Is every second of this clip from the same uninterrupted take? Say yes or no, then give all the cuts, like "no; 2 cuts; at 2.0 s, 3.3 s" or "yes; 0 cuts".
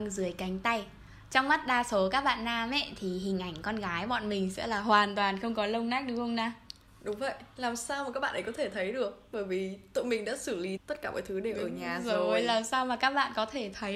no; 1 cut; at 10.8 s